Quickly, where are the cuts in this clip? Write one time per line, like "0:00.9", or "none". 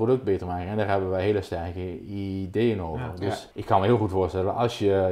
0:03.5